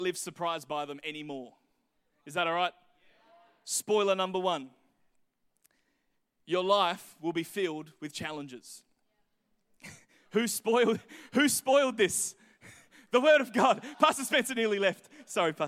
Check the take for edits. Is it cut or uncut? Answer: uncut